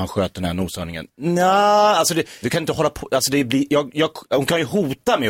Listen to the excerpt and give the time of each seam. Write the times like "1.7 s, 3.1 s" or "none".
2.4 s